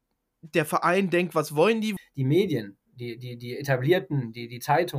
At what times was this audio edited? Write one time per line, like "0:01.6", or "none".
0:02.0

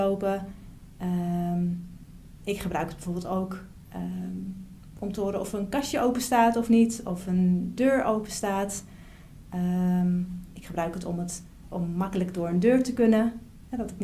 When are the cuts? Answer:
none

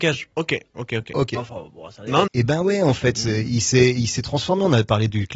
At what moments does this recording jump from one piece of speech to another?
0:02.3

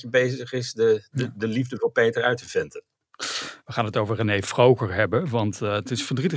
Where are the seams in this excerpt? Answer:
none

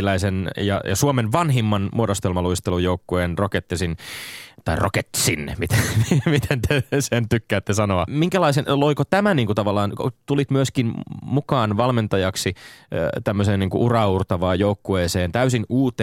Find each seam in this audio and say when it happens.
0:08.1

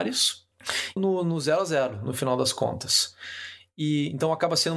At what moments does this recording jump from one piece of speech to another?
0:01.0

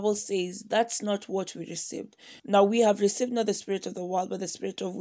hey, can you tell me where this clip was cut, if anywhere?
0:02.4

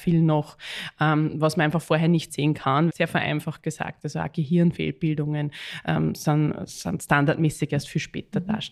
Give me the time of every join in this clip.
0:02.9

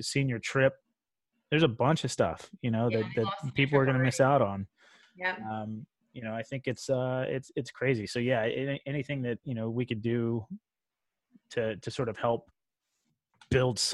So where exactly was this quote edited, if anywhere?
none

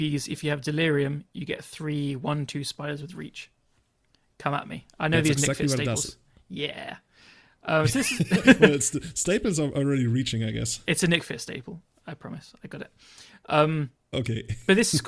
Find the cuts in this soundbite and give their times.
none

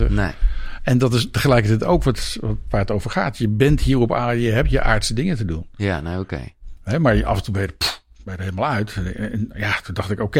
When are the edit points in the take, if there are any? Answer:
none

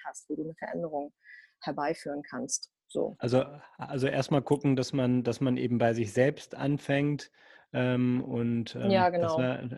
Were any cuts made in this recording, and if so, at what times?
none

